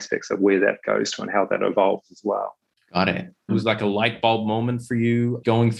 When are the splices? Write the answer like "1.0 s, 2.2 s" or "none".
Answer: 3.5 s